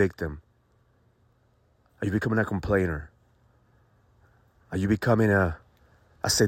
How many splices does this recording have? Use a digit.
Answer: 0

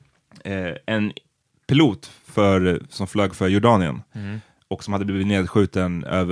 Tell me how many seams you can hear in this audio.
0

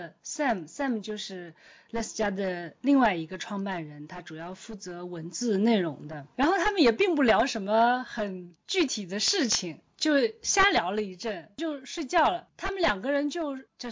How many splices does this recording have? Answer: 1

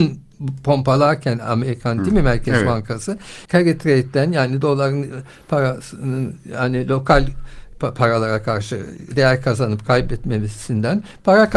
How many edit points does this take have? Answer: 1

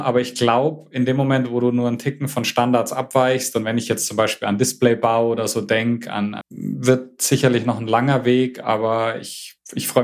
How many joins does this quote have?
1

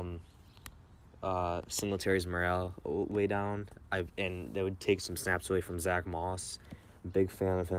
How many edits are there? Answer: 0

